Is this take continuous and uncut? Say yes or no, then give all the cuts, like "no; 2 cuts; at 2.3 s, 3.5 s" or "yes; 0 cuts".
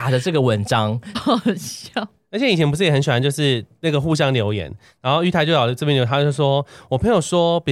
no; 1 cut; at 1.1 s